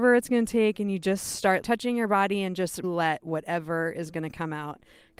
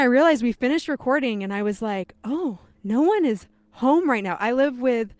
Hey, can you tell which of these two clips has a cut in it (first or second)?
first